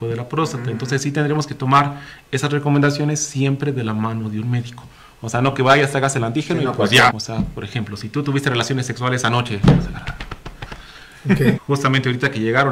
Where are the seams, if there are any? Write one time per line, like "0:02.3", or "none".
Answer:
0:07.1
0:11.6